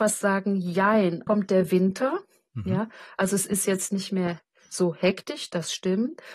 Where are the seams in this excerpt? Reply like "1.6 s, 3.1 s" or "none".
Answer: 1.3 s